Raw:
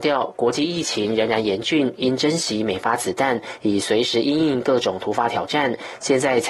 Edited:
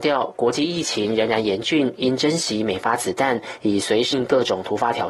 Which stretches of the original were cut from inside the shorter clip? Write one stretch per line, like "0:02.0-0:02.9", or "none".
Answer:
0:04.1-0:04.5